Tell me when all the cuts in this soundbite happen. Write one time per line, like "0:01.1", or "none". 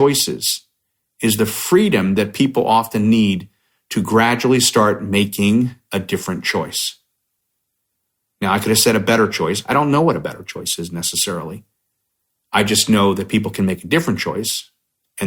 none